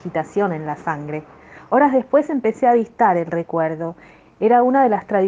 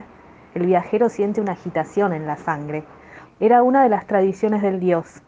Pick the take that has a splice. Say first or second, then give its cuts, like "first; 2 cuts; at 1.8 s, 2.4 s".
second; 1 cut; at 3.2 s